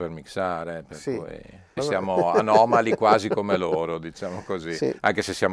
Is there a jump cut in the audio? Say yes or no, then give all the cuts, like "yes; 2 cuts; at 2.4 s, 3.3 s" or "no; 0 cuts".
yes; 1 cut; at 1.8 s